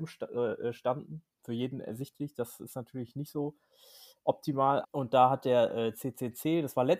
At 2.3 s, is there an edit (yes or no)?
no